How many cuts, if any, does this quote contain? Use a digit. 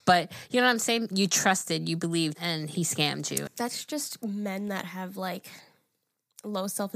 2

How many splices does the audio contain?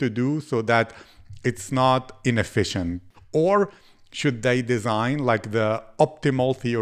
1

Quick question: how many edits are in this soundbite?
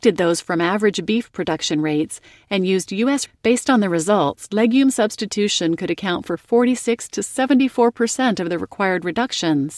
1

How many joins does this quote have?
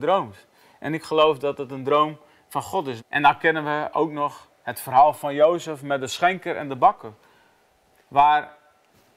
1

